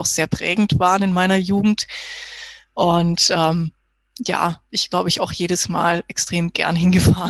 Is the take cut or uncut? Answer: uncut